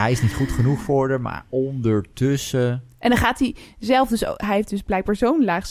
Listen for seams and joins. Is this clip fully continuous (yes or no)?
yes